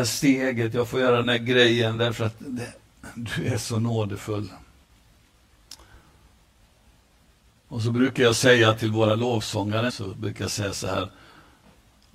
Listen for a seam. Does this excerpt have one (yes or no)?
yes